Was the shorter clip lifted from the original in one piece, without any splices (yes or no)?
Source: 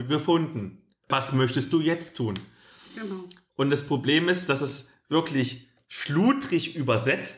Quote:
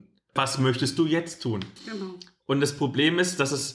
no